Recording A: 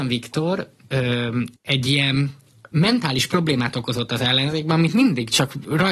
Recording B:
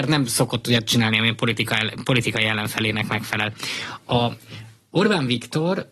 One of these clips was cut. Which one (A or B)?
A